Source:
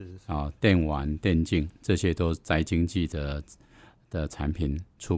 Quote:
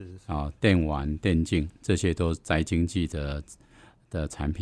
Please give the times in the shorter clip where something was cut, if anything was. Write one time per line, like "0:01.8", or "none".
none